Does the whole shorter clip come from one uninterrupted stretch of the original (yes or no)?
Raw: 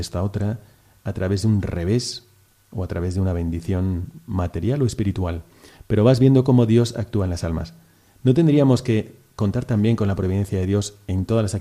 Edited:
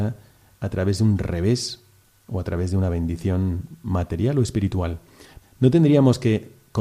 no